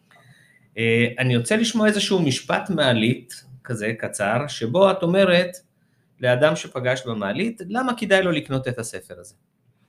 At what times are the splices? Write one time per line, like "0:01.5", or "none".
none